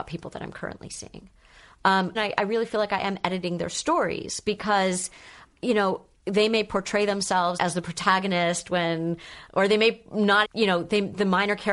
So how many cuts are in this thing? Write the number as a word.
three